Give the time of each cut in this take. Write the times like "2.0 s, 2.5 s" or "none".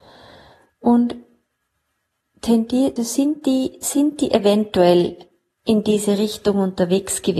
3.0 s